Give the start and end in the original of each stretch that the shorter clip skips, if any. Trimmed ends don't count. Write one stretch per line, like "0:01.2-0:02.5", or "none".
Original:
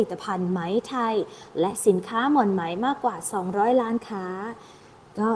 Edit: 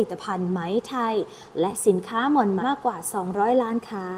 0:02.6-0:02.8